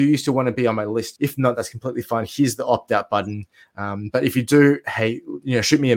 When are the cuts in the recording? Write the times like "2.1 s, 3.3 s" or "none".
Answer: 1.1 s